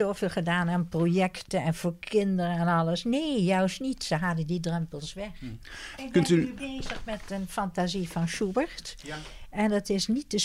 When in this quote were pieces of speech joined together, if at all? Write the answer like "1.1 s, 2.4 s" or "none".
6.0 s